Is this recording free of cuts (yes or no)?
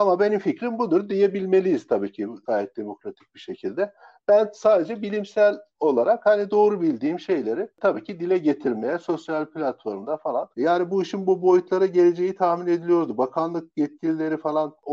no